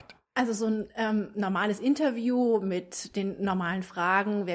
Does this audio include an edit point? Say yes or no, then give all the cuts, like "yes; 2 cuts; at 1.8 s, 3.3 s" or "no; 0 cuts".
no; 0 cuts